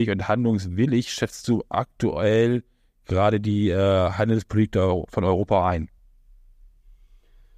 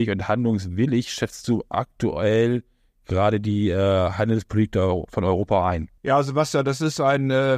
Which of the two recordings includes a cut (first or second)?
second